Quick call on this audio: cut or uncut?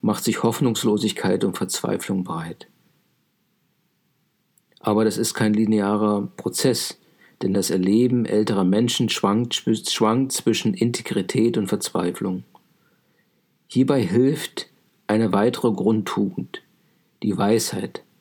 uncut